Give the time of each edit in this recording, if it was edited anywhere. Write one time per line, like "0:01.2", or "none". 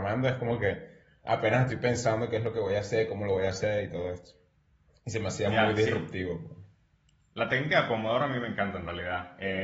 none